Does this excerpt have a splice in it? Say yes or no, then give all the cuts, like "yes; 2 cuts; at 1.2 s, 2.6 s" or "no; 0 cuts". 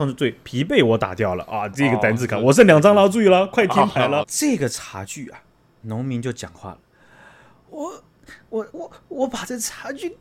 yes; 3 cuts; at 4.2 s, 5.8 s, 8.7 s